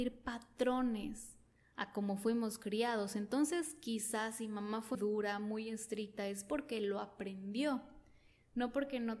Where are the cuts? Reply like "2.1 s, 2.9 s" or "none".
4.9 s

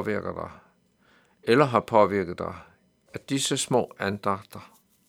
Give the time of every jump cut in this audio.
3.1 s

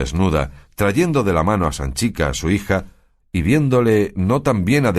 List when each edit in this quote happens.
3.2 s

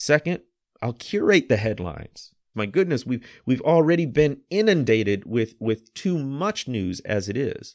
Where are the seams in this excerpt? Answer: 2.5 s

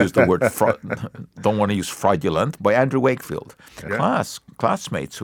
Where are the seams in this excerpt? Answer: 2.6 s, 3.9 s

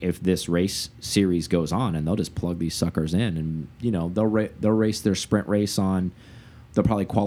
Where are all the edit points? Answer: none

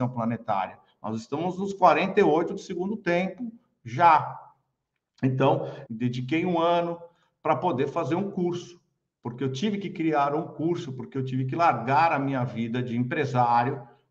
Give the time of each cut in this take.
5.9 s

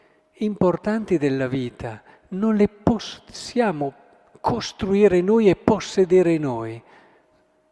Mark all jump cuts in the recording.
none

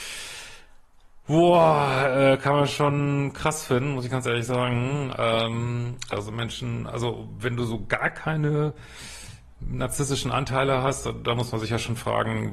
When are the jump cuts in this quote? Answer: 6.1 s

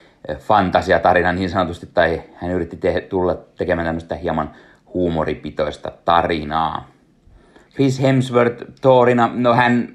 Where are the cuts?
7.7 s

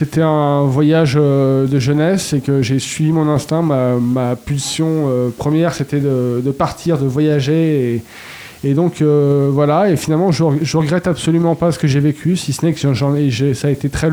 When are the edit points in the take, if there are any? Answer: none

